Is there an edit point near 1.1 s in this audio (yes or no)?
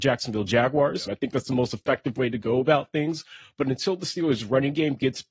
yes